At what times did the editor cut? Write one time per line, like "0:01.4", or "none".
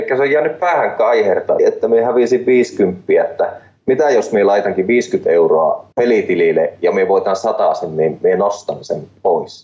0:01.6
0:05.9